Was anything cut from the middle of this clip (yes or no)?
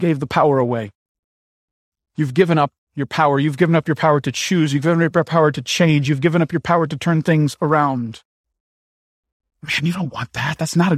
no